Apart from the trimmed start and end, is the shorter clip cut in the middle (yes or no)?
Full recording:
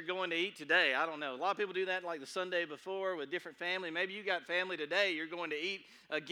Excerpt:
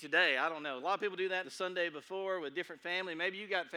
yes